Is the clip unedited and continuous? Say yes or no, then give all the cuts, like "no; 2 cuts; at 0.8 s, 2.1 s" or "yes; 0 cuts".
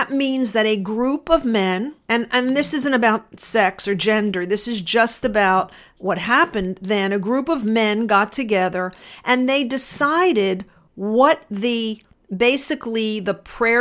no; 1 cut; at 2.0 s